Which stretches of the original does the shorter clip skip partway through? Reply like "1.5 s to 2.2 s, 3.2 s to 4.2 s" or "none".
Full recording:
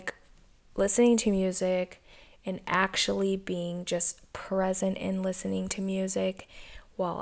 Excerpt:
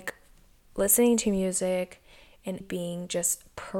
2.6 s to 3.4 s